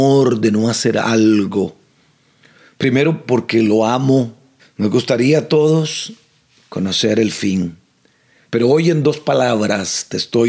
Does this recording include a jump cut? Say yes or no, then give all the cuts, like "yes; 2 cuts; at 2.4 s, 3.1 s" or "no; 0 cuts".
yes; 1 cut; at 4.6 s